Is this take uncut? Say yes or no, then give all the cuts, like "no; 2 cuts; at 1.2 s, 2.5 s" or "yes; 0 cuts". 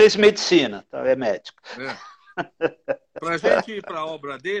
yes; 0 cuts